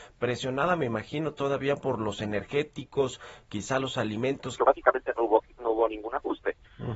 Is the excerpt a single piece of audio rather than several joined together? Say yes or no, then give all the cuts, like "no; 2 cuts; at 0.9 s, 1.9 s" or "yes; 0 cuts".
no; 1 cut; at 4.6 s